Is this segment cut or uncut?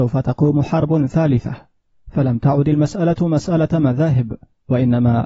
uncut